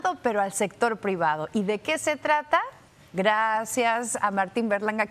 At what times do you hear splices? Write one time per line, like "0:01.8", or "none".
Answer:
none